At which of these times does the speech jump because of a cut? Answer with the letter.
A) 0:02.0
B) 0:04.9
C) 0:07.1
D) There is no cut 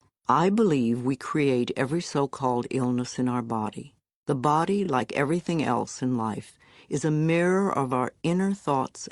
D